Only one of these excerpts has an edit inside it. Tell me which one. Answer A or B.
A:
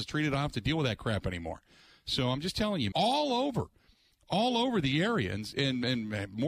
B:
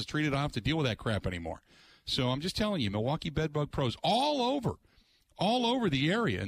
A